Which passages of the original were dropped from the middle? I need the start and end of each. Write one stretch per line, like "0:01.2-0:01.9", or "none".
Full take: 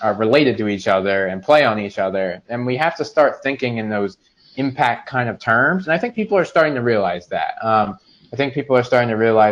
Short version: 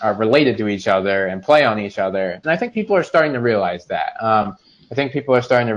0:02.4-0:05.8